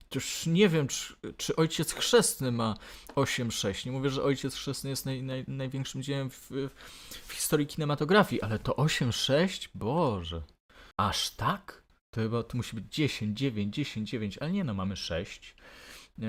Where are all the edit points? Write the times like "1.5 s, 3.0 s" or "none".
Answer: 10.9 s